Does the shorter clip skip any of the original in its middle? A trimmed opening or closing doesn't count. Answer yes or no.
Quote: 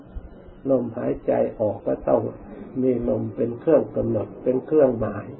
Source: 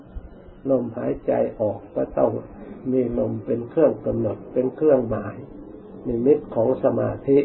yes